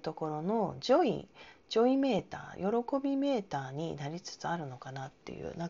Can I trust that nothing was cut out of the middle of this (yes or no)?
yes